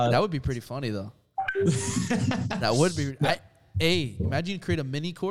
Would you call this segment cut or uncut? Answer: uncut